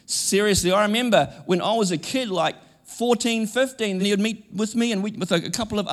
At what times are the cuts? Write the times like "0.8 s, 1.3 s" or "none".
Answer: 4.0 s